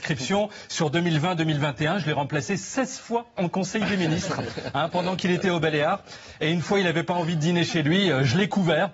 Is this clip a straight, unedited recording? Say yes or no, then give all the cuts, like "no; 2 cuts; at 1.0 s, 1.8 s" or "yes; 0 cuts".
yes; 0 cuts